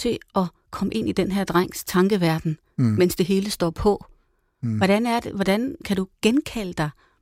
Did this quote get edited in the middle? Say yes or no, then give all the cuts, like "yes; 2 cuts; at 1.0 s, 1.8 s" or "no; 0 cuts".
no; 0 cuts